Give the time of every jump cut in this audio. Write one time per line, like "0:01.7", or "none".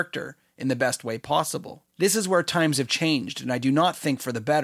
0:01.9

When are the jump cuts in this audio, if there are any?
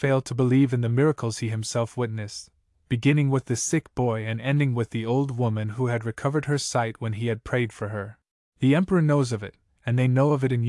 0:08.5

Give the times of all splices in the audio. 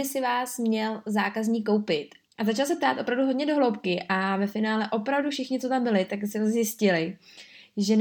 0:02.3

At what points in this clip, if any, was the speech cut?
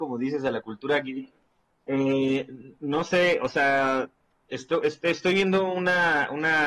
none

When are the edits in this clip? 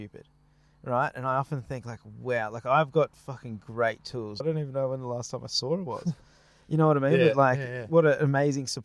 0:04.4

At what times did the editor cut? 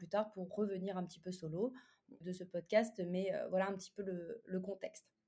0:02.2

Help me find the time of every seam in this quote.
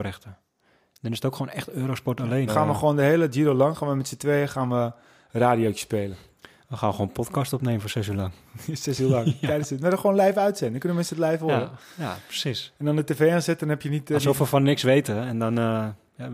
0:02.5

